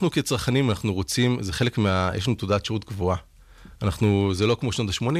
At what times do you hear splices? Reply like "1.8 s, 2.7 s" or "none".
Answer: none